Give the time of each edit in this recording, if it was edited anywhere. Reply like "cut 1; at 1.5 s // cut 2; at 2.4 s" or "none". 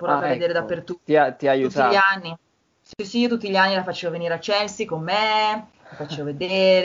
none